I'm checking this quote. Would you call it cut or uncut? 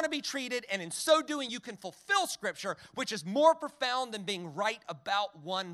uncut